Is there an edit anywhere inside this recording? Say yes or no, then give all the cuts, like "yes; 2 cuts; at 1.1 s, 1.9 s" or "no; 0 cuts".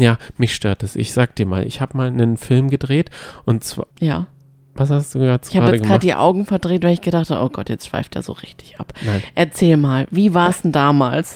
yes; 1 cut; at 3.9 s